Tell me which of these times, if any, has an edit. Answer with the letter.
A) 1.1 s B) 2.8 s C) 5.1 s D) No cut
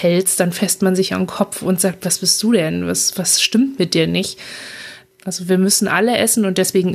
C